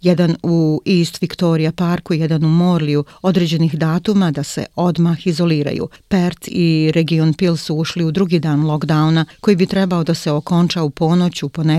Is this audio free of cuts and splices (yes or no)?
yes